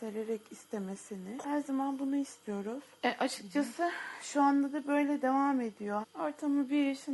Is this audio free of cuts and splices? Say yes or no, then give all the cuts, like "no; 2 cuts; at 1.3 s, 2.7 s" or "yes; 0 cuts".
no; 1 cut; at 6.0 s